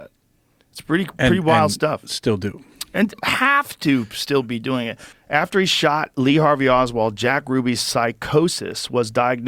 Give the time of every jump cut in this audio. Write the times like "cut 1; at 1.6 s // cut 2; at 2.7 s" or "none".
cut 1; at 5.1 s